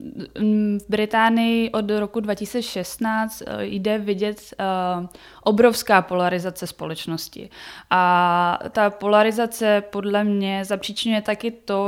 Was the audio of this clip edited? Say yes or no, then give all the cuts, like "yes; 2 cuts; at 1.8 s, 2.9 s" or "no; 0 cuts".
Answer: no; 0 cuts